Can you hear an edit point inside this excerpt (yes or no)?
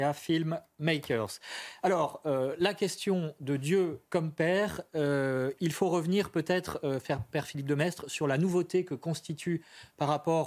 no